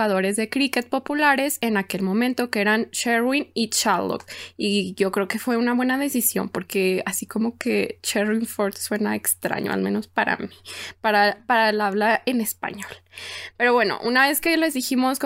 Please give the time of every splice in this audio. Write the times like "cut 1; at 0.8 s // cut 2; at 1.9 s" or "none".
none